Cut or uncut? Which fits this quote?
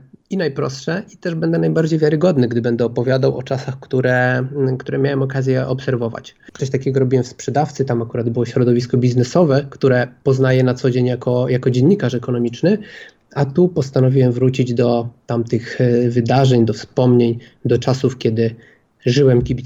cut